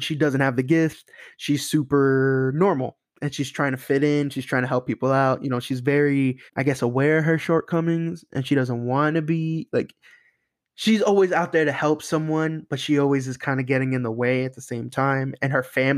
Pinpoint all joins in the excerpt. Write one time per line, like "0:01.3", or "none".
0:06.5